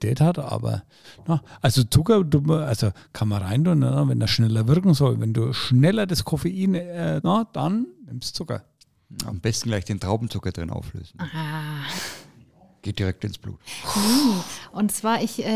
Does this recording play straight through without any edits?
no; 1 cut; at 7.2 s

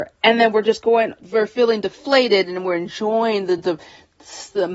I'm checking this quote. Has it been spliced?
no; 0 cuts

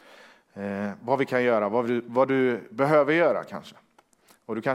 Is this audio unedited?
yes; 0 cuts

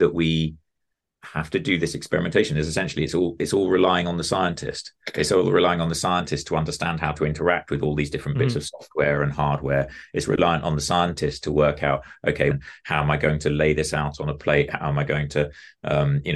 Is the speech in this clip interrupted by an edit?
yes; 1 cut; at 12.5 s

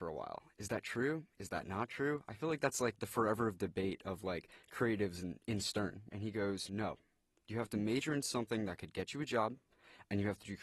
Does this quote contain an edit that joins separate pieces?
yes; 1 cut; at 6.1 s

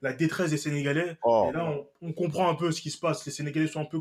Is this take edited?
no; 0 cuts

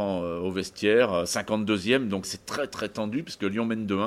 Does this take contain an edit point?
yes; 1 cut; at 2.2 s

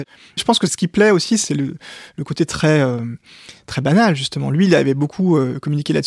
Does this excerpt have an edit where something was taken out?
no; 0 cuts

